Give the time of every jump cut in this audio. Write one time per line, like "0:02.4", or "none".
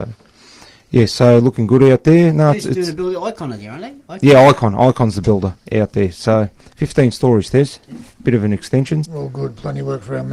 0:09.0